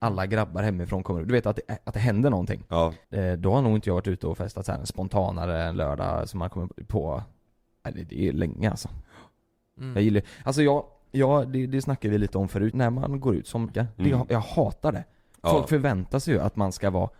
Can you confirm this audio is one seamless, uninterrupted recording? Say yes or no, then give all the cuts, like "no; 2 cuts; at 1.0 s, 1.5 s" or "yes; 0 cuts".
no; 3 cuts; at 3.0 s, 12.7 s, 13.7 s